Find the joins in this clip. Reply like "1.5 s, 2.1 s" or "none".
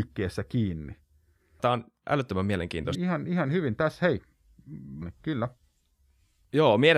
1.6 s, 2.9 s, 5.0 s